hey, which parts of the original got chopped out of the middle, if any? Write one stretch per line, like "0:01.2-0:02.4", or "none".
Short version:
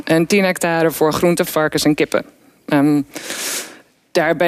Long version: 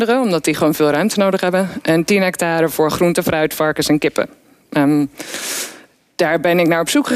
0:03.2-0:03.5